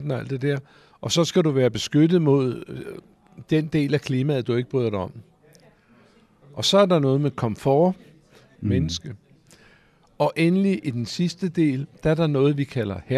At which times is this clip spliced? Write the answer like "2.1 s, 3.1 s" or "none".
8.5 s